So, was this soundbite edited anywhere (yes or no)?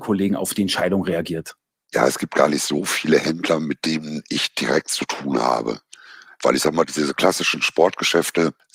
no